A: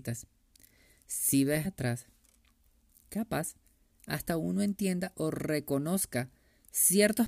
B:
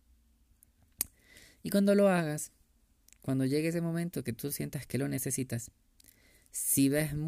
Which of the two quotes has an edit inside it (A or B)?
A